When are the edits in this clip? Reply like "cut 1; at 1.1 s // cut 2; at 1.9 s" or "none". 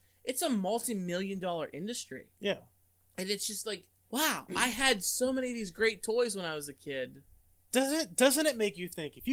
cut 1; at 4.0 s